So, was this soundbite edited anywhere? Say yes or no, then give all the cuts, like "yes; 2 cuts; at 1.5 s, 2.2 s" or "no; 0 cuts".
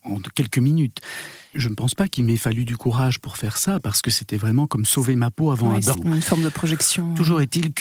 yes; 2 cuts; at 1.5 s, 5.9 s